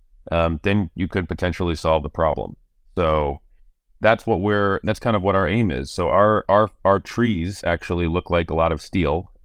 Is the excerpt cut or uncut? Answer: uncut